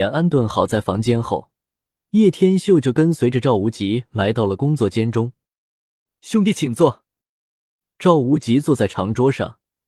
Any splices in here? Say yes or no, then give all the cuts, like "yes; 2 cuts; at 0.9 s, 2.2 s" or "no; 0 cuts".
no; 0 cuts